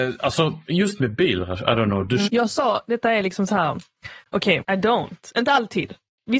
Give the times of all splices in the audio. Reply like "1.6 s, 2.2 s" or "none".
2.3 s, 4.6 s